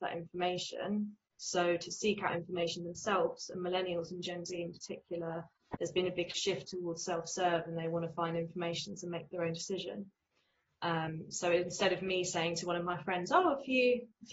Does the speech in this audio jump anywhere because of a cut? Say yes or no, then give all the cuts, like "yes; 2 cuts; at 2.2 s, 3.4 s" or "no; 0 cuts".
yes; 1 cut; at 1.3 s